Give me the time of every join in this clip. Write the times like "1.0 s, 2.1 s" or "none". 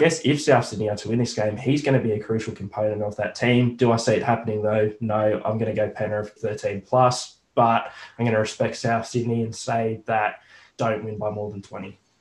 6.4 s, 10.7 s